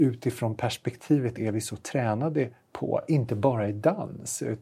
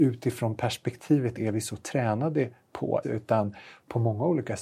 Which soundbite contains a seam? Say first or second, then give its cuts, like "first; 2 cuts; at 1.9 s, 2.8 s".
second; 1 cut; at 3.0 s